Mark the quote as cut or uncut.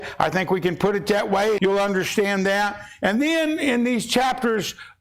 cut